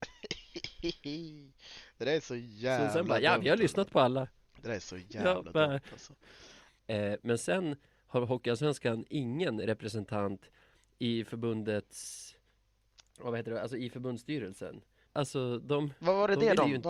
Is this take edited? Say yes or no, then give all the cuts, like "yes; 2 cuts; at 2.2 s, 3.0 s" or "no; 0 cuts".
yes; 2 cuts; at 6.8 s, 15.1 s